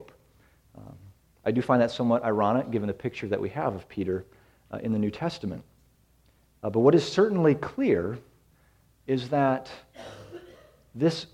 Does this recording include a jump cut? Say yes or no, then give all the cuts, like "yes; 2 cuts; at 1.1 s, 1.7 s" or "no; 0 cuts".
no; 0 cuts